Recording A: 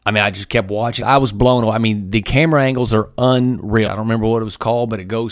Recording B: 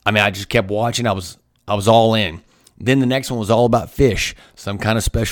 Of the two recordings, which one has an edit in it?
A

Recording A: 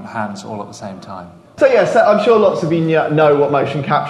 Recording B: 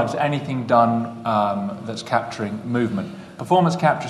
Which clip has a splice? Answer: A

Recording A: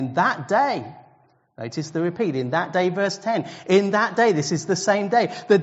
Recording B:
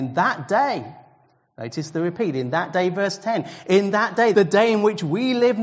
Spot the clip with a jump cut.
B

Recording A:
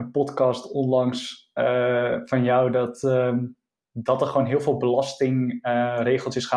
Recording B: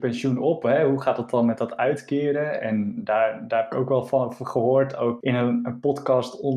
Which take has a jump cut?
B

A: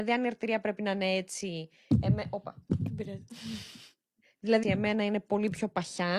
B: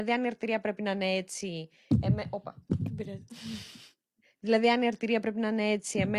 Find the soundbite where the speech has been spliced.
A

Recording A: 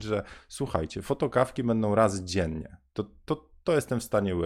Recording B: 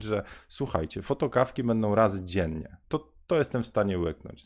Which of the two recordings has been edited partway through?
B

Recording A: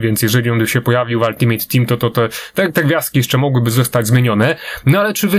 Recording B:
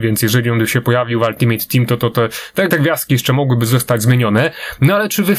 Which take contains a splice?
B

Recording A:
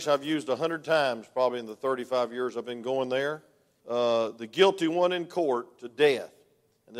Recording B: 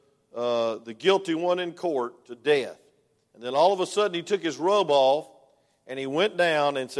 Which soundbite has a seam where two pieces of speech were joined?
A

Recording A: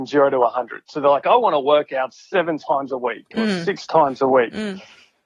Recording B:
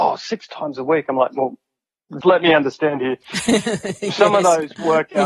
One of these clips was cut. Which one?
B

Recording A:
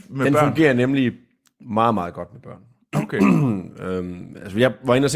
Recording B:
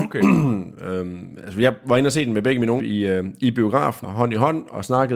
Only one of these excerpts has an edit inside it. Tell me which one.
B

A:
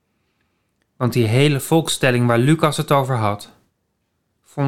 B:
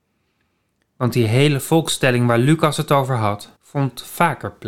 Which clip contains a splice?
B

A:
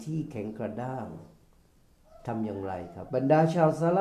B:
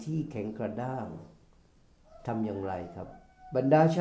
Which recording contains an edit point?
A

